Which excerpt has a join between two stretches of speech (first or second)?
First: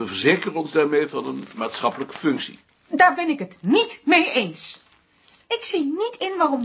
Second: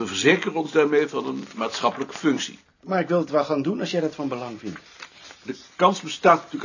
second